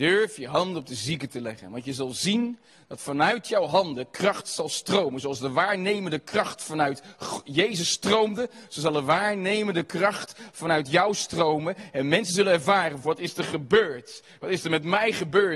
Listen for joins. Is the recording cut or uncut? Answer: cut